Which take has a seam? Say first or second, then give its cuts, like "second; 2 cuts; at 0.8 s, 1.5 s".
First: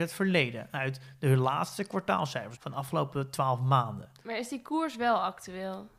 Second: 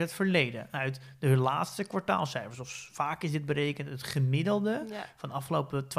first; 1 cut; at 2.6 s